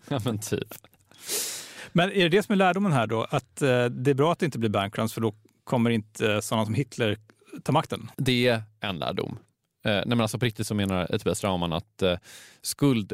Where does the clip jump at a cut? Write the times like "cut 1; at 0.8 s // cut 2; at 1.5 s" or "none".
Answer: cut 1; at 8.1 s